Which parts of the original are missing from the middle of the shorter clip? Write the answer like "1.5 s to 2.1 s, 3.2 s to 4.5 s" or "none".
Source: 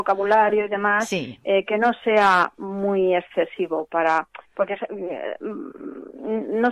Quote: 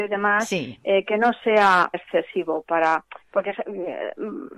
2.5 s to 3.2 s